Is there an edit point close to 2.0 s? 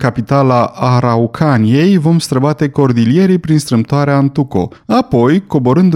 no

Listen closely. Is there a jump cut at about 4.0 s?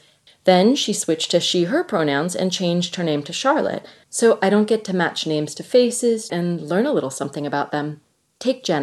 yes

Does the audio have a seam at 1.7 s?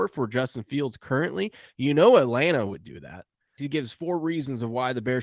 no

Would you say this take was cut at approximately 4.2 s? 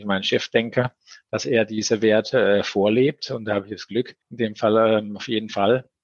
yes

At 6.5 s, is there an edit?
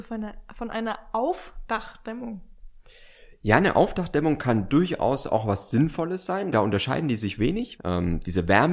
yes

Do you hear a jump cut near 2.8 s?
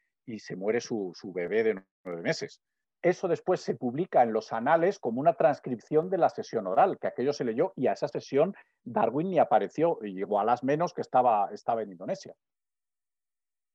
yes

